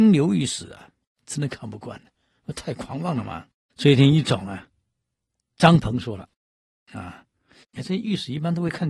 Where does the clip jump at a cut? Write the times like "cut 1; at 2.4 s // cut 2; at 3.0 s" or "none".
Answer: cut 1; at 3.7 s // cut 2; at 7.6 s

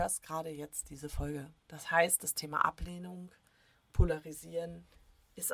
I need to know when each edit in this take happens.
none

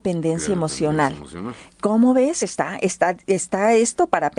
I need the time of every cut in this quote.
none

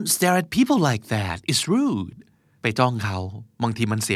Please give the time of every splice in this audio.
none

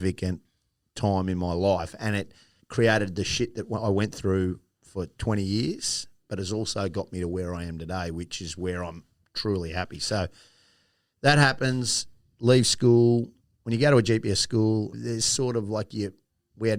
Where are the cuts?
cut 1; at 2.6 s // cut 2; at 14.9 s

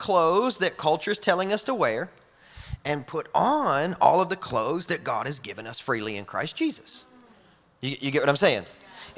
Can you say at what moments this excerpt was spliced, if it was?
none

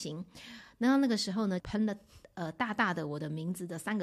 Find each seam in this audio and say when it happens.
cut 1; at 1.6 s

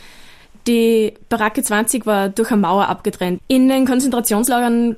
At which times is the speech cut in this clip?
cut 1; at 3.4 s

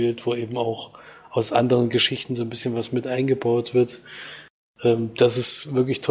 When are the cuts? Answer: none

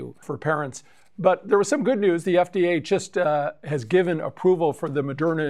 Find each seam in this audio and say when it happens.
none

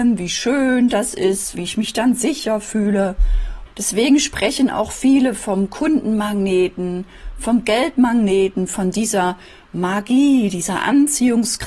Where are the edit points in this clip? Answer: cut 1; at 1.5 s // cut 2; at 3.7 s // cut 3; at 8.7 s

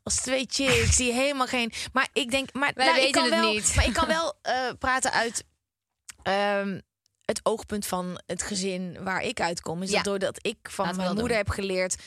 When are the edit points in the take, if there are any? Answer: cut 1; at 2.1 s

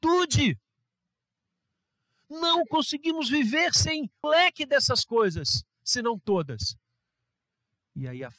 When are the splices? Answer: cut 1; at 4.2 s

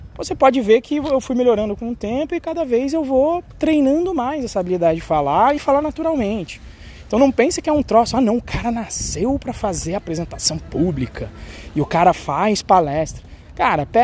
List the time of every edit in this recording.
cut 1; at 5.6 s

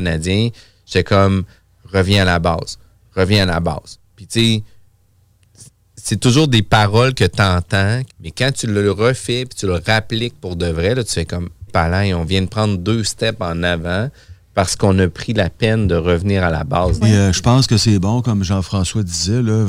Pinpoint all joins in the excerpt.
cut 1; at 8.1 s // cut 2; at 11.7 s // cut 3; at 17.0 s

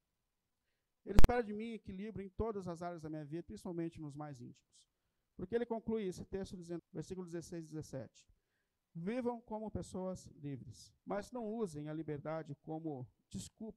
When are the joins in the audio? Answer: cut 1; at 3.4 s // cut 2; at 6.8 s // cut 3; at 11.0 s

